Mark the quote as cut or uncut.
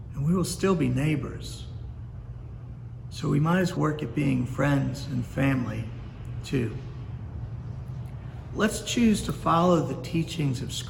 cut